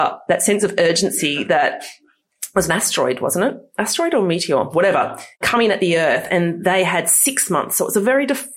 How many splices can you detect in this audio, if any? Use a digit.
0